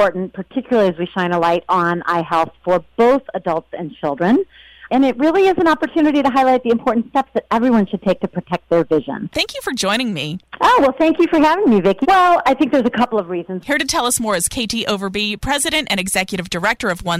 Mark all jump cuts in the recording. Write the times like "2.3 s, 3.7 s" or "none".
9.3 s, 12.0 s, 13.6 s